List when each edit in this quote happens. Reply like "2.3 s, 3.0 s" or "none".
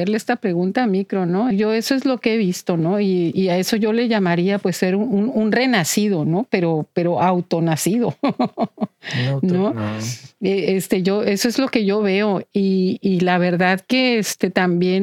1.5 s